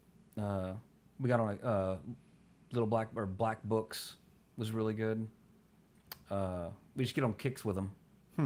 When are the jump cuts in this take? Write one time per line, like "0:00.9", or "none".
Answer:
none